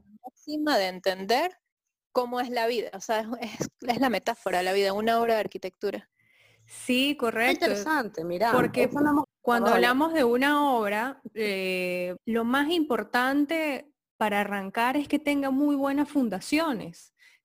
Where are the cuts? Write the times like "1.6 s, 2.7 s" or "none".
9.2 s, 12.2 s